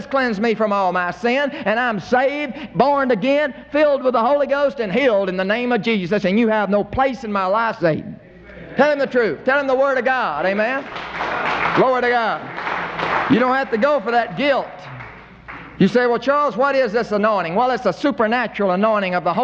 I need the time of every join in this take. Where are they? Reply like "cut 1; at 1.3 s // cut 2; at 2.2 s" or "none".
cut 1; at 7.8 s